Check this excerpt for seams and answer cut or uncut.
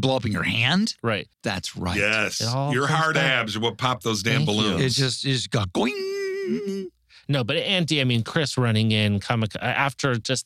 cut